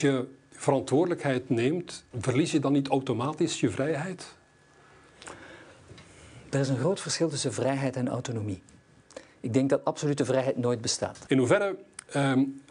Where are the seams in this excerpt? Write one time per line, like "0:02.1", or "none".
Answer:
0:02.1
0:11.3